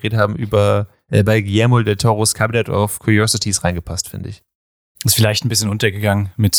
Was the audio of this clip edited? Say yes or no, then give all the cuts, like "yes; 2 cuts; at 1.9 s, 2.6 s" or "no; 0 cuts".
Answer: yes; 1 cut; at 4.9 s